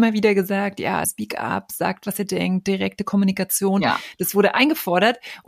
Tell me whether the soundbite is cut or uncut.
cut